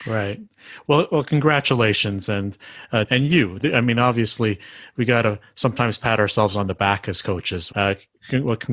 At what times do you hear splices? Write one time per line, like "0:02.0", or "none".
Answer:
0:03.1
0:07.7